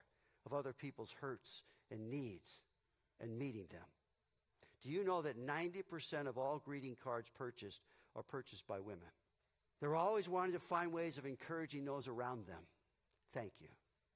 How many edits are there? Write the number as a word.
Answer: one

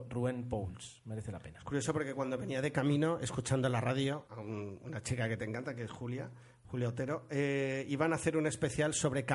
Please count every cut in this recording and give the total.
one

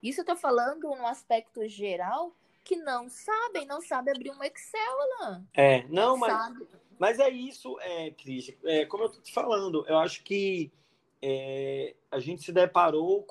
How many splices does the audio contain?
zero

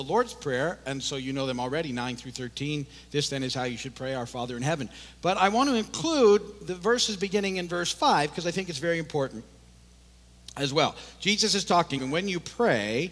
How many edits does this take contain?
one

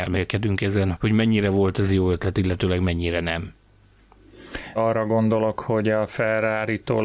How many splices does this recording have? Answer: two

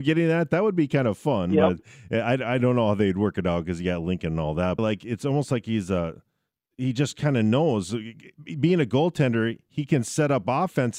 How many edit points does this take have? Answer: one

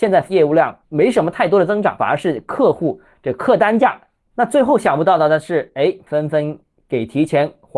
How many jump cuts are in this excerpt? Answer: two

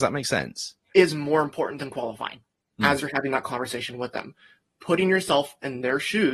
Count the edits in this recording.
two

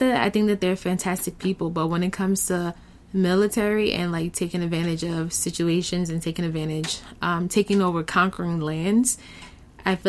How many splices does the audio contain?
zero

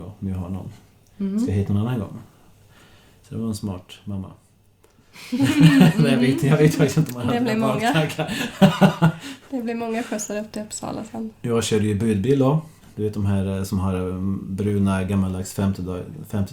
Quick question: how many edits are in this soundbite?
two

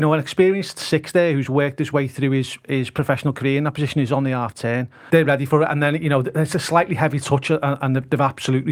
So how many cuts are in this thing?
one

